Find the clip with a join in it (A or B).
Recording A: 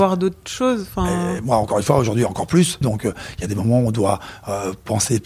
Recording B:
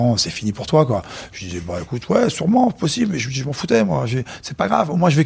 A